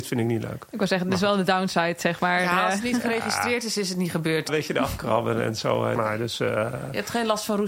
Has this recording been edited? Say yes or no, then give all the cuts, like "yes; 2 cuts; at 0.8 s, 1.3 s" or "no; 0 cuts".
yes; 2 cuts; at 4.5 s, 6.0 s